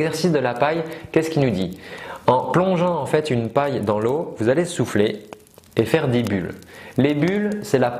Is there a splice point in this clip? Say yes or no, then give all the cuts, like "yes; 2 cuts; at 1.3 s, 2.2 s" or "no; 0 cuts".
no; 0 cuts